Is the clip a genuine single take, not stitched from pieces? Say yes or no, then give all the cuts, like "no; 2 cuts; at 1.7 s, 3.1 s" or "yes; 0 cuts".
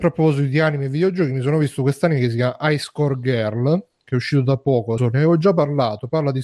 no; 1 cut; at 5.0 s